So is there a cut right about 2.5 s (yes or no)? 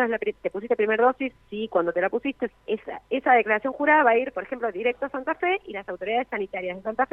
yes